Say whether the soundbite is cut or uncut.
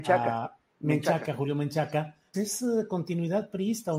cut